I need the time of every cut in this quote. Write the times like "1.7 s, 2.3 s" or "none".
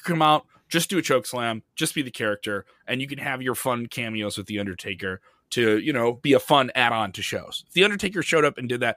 none